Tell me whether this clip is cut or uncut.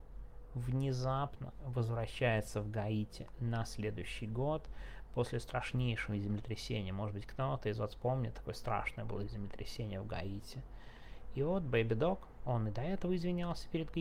uncut